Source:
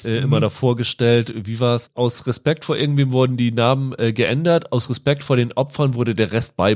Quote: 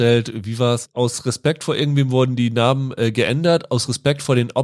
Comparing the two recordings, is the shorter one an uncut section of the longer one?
yes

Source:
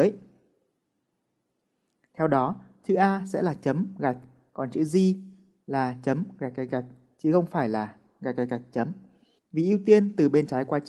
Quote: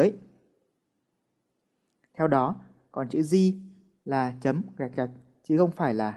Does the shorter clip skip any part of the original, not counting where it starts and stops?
yes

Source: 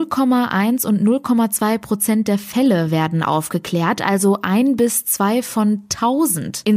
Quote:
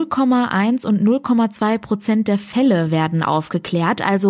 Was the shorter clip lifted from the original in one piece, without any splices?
yes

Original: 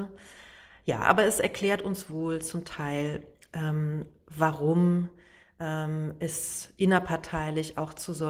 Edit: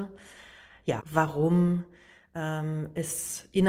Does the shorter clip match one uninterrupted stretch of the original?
no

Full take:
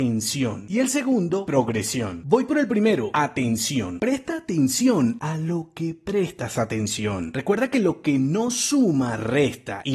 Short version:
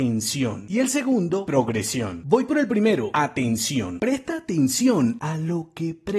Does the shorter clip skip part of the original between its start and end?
no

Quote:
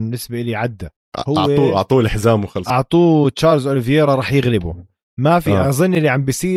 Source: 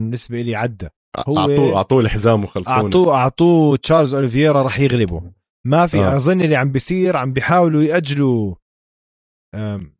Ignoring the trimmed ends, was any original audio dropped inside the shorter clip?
yes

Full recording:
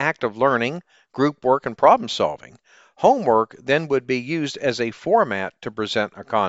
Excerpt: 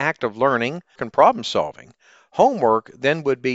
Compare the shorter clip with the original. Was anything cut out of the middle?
yes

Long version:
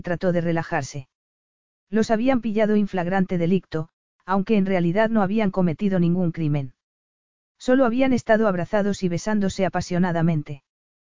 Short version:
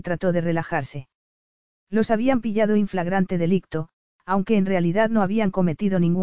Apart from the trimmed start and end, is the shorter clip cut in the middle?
no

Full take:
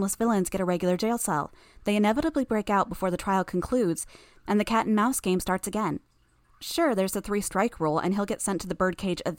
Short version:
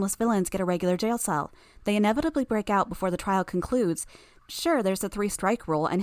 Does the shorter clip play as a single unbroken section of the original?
no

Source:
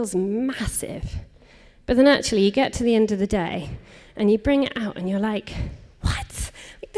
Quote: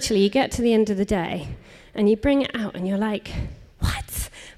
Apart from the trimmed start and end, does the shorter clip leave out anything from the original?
no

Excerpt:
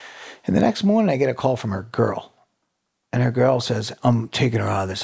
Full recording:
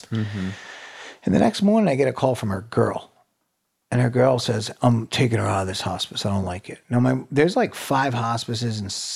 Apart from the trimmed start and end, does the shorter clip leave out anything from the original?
no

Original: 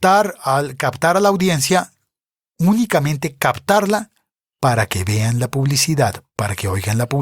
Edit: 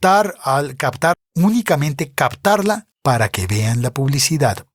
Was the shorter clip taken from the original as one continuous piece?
no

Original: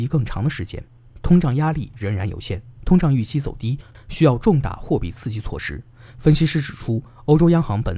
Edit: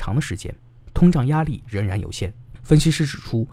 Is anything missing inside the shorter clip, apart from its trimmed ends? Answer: yes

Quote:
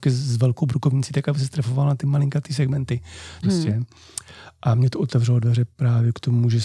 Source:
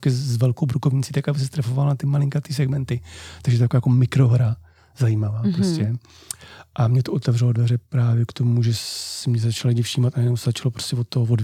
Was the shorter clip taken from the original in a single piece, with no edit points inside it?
no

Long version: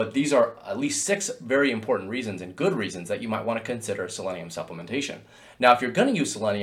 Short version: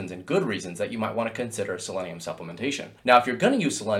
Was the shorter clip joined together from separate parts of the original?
yes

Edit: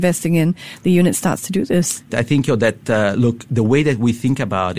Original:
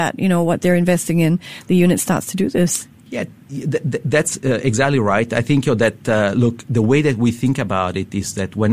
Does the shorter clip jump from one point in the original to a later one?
yes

